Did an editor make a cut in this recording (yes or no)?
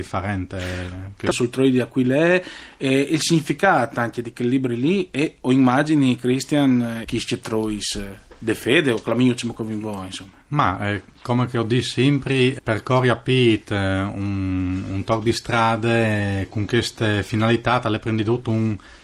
yes